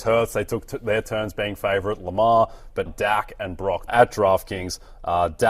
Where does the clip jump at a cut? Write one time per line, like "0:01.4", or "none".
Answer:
0:02.9
0:03.9